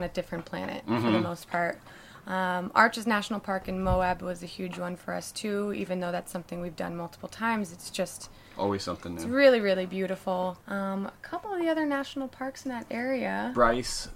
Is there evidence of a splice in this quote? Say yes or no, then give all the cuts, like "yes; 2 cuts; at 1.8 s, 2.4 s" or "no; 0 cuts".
yes; 1 cut; at 10.6 s